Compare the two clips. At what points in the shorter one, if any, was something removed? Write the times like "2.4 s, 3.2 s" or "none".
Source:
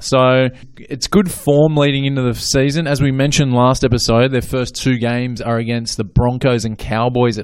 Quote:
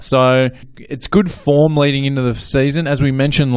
none